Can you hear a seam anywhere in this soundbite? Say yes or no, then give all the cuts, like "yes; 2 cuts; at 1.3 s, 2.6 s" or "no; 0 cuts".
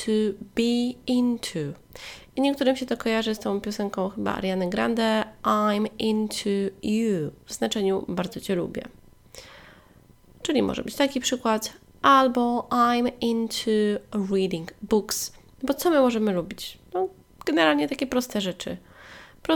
no; 0 cuts